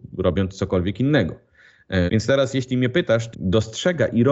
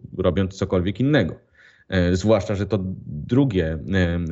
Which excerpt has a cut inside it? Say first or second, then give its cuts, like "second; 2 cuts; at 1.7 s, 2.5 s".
first; 2 cuts; at 2.1 s, 3.3 s